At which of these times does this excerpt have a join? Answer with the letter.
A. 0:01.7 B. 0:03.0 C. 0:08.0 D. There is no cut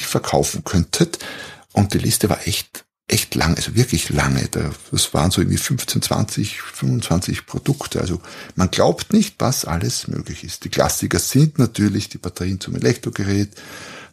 D